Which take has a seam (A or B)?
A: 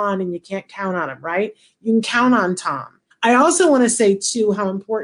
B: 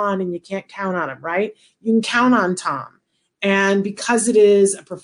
A